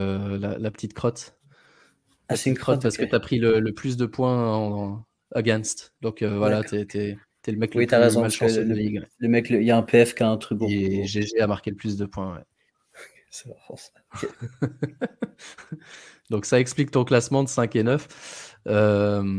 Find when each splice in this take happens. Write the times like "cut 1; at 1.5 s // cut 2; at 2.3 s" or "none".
none